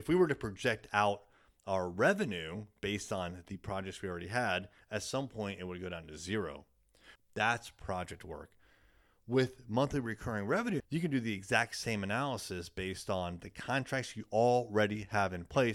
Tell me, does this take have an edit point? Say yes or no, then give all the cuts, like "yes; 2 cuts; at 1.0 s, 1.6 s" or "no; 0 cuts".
yes; 2 cuts; at 7.2 s, 10.8 s